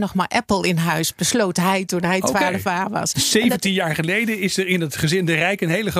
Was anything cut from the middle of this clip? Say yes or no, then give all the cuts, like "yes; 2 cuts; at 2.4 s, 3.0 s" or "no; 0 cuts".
no; 0 cuts